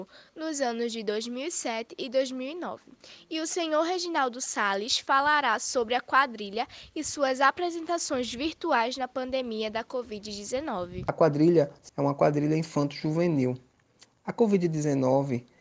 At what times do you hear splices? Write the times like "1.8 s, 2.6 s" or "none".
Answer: none